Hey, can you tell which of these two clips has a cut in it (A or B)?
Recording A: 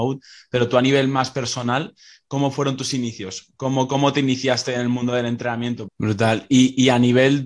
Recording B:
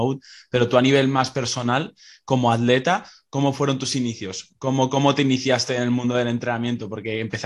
A